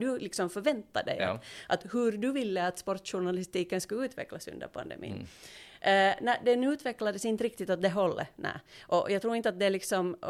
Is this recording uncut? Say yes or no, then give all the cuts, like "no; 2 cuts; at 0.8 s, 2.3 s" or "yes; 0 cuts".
yes; 0 cuts